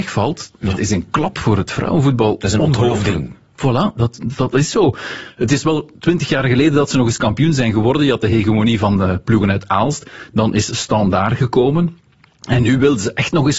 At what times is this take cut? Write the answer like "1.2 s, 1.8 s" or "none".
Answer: none